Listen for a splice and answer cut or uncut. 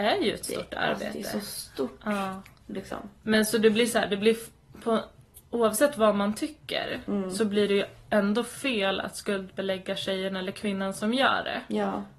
uncut